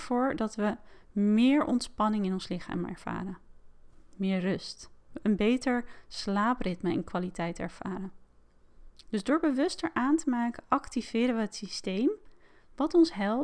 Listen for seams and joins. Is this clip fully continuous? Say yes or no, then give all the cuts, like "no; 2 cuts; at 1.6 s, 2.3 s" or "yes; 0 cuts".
no; 2 cuts; at 5.0 s, 9.0 s